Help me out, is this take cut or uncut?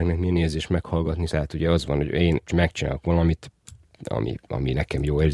cut